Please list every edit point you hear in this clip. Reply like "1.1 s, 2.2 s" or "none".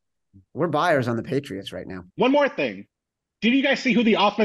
2.1 s

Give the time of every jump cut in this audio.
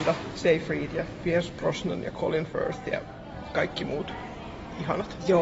none

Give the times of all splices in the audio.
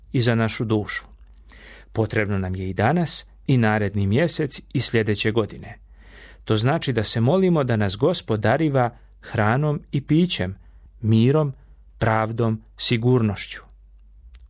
3.5 s, 10.9 s

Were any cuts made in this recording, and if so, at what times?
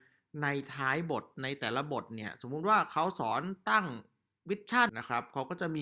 4.9 s

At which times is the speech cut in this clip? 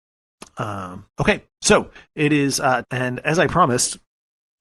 2.8 s

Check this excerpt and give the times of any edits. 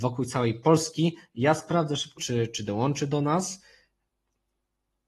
2.2 s

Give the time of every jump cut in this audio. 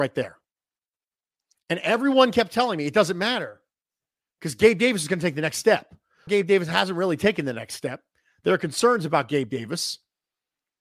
6.3 s

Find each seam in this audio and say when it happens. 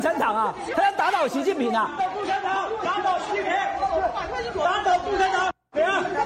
2.0 s

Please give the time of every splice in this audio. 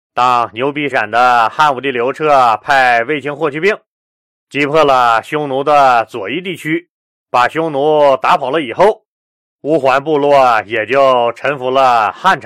0.9 s

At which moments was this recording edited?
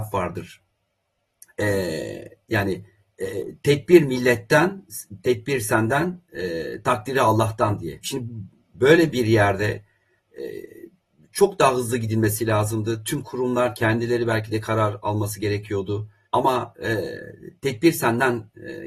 8.0 s, 16.3 s

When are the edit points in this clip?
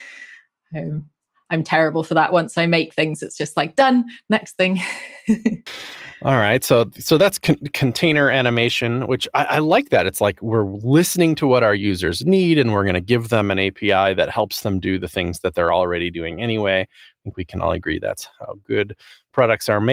none

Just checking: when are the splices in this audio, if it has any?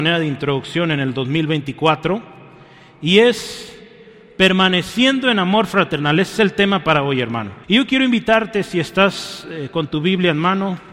7.6 s

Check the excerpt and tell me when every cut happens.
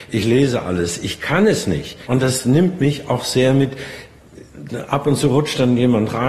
2.0 s

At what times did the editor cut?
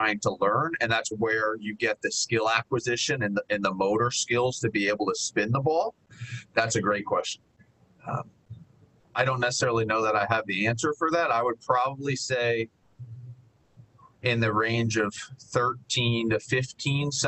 1.1 s, 6.4 s

